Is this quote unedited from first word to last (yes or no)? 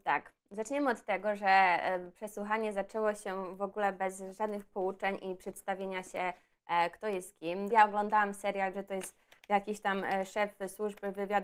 no